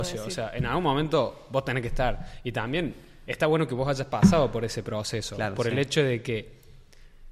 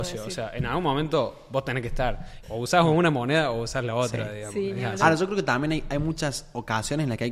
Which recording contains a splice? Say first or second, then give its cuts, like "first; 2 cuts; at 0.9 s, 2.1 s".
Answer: second; 1 cut; at 2.4 s